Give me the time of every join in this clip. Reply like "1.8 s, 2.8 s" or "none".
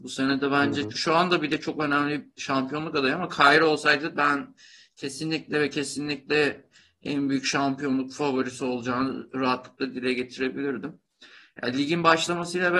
0.9 s